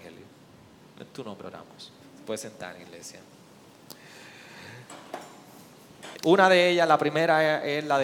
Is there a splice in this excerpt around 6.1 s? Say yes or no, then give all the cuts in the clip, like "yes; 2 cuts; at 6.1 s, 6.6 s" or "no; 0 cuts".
yes; 2 cuts; at 2.0 s, 6.1 s